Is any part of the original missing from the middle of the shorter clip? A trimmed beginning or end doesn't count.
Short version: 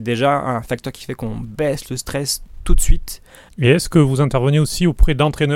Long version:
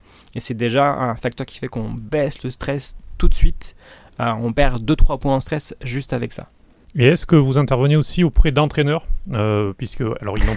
yes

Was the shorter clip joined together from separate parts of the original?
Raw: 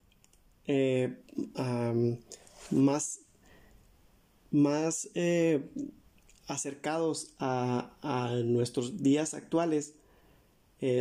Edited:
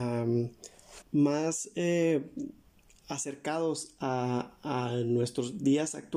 yes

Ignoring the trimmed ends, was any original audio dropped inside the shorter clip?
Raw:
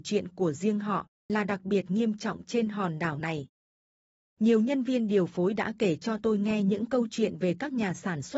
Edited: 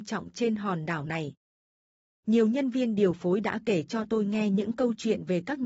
no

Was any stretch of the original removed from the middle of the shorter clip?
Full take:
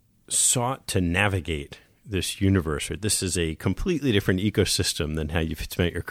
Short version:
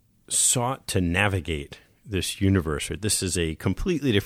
no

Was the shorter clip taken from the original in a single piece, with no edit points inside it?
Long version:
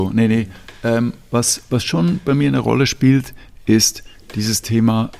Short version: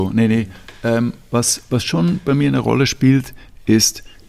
yes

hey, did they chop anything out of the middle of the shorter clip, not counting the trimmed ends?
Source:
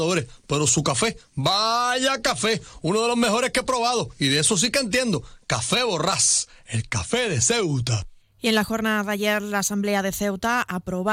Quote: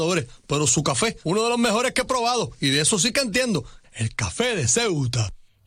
yes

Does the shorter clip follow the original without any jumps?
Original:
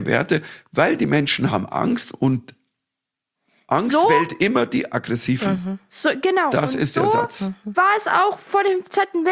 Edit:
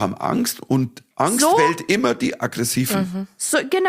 no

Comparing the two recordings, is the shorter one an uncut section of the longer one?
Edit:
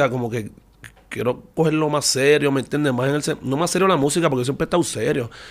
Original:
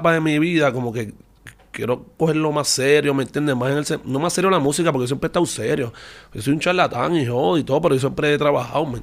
yes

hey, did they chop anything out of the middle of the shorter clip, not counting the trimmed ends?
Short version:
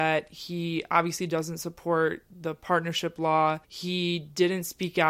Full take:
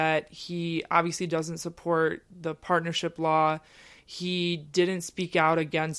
yes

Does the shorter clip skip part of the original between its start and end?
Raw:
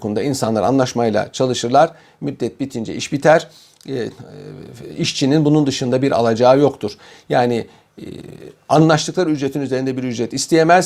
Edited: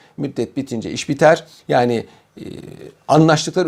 yes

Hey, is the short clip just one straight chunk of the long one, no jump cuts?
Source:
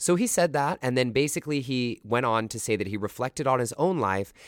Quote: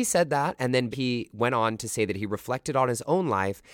no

